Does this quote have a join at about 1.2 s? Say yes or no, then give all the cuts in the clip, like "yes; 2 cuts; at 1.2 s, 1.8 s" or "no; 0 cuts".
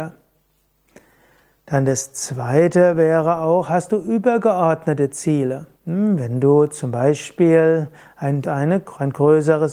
no; 2 cuts; at 5.7 s, 8.4 s